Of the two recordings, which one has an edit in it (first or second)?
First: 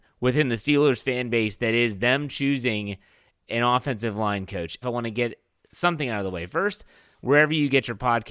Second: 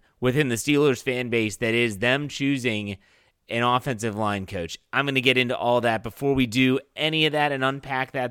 first